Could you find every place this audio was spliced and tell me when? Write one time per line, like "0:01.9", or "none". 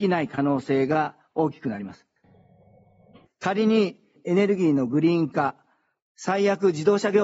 0:03.2
0:06.0